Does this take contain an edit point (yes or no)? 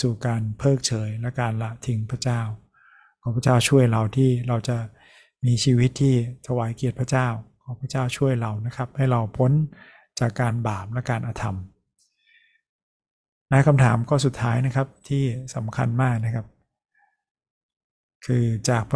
no